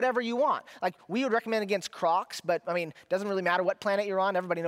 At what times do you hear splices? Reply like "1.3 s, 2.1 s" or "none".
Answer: none